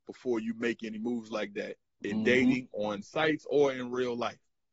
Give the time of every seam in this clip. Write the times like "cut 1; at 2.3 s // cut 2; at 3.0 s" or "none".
none